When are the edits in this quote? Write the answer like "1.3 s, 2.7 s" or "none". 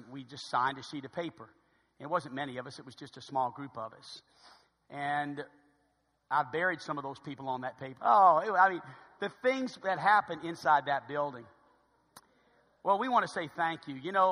8.0 s